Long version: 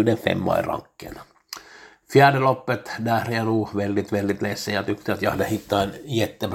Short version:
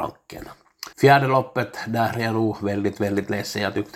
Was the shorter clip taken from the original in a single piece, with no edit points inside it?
no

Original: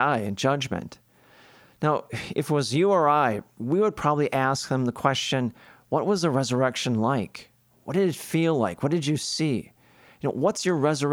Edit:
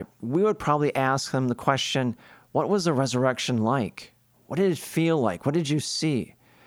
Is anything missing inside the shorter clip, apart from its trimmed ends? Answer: no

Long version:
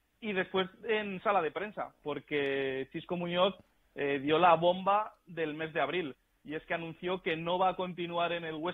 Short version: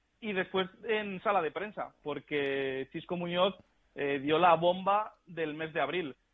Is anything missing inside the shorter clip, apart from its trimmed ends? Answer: no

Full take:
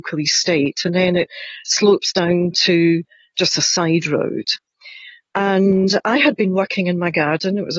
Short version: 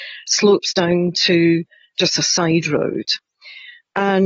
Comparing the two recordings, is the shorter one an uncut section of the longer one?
yes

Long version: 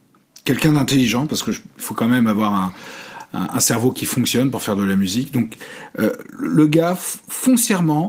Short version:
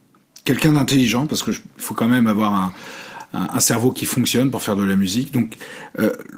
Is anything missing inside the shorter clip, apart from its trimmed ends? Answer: no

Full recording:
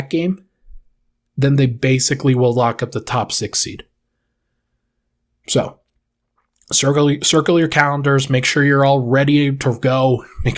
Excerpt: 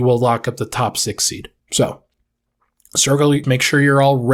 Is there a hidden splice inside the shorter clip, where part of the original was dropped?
yes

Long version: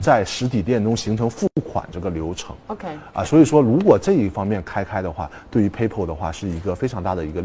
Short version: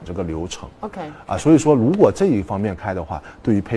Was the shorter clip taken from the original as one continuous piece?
no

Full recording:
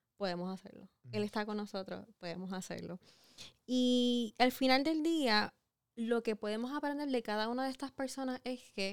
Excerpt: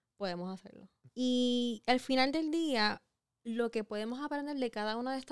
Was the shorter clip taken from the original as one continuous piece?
no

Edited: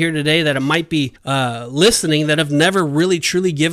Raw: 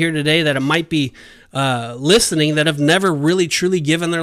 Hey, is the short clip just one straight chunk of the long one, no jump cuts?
no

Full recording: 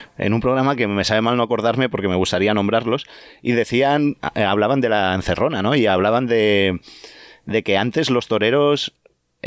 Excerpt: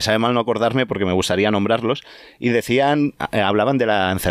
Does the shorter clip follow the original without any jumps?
yes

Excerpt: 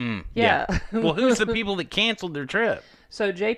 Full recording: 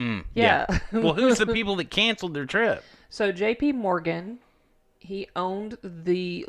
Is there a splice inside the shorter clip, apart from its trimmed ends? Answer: no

